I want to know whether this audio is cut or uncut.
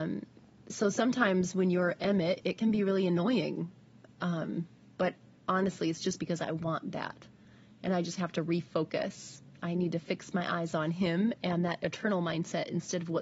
uncut